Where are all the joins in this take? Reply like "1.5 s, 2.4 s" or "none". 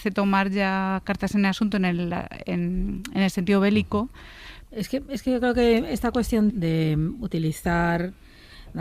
4.7 s, 6.5 s